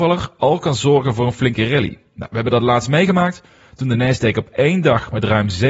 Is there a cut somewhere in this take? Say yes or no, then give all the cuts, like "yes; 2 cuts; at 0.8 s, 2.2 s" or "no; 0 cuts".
no; 0 cuts